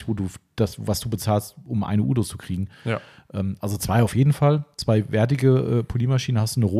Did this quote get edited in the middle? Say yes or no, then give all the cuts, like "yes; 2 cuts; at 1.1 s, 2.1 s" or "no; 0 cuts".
no; 0 cuts